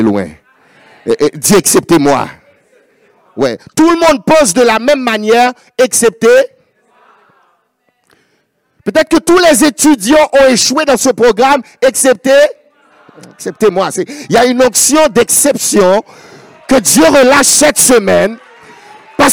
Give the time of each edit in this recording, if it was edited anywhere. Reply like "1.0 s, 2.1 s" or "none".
none